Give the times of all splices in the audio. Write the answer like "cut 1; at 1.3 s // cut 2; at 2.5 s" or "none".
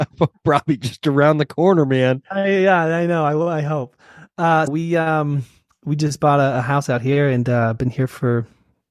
cut 1; at 4.7 s